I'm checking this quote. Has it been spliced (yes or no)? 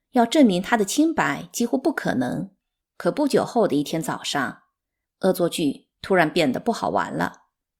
yes